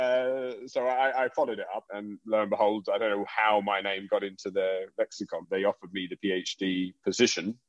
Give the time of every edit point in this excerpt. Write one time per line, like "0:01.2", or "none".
0:01.9
0:05.4